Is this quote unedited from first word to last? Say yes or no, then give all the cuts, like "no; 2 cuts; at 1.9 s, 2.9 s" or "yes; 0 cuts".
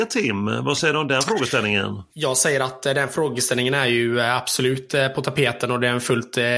no; 1 cut; at 2.1 s